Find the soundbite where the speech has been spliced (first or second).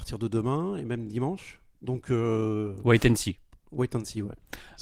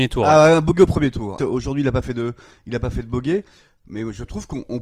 second